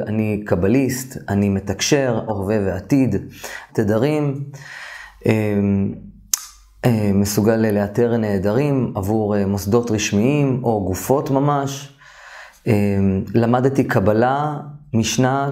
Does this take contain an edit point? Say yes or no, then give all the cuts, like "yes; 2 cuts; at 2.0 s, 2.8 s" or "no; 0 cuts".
yes; 2 cuts; at 2.3 s, 3.7 s